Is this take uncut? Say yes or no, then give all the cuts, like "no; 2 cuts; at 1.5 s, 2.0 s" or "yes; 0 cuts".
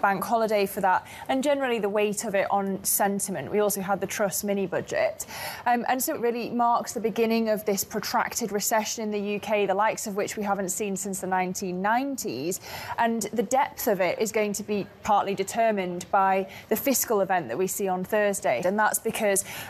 no; 2 cuts; at 6.1 s, 18.6 s